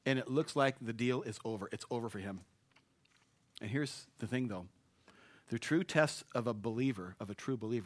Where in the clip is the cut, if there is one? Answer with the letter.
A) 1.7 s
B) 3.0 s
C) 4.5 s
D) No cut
D